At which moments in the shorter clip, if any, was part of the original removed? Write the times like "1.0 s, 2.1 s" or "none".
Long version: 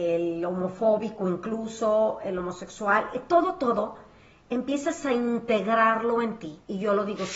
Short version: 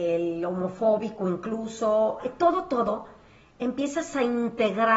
2.2 s